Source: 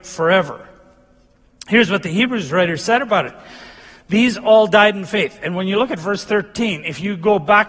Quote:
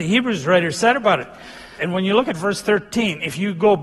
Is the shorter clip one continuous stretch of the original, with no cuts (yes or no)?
no